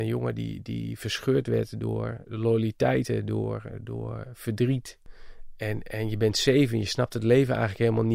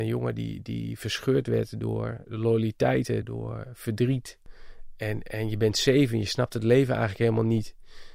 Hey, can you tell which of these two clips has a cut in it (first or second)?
second